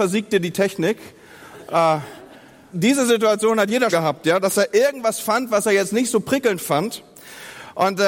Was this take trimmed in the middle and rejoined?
yes; 2 cuts; at 2.7 s, 3.9 s

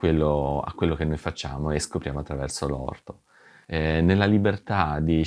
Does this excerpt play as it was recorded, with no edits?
no; 1 cut; at 3.6 s

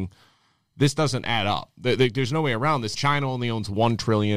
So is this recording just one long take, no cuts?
no; 1 cut; at 2.9 s

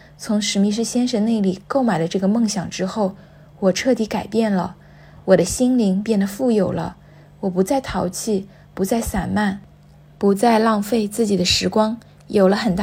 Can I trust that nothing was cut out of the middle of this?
yes; 0 cuts

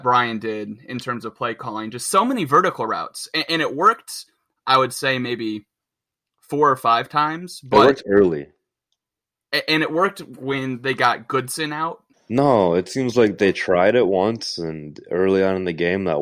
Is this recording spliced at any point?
yes; 1 cut; at 12.1 s

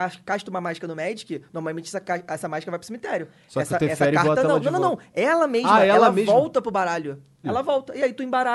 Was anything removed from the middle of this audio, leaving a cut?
yes; 1 cut; at 7.4 s

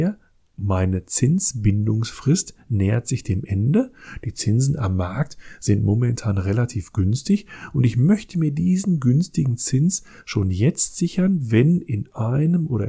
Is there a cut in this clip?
no; 0 cuts

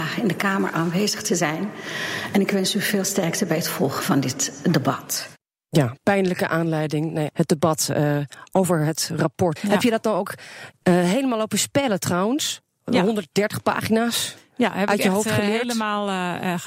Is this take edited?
yes; 2 cuts; at 7.3 s, 9.6 s

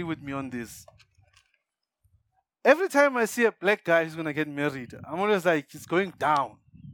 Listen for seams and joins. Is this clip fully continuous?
yes; 0 cuts

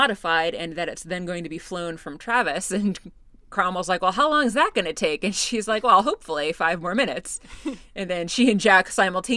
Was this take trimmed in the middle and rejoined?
no; 0 cuts

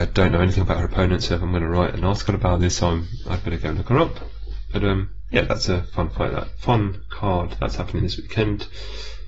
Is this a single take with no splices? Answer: yes; 0 cuts

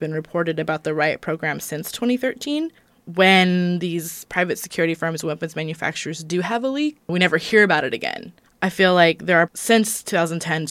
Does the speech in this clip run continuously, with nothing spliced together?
no; 2 cuts; at 8.4 s, 9.5 s

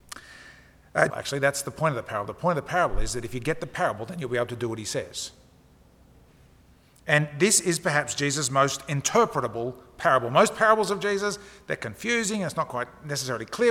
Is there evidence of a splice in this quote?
yes; 1 cut; at 1.1 s

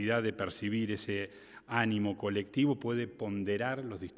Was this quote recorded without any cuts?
yes; 0 cuts

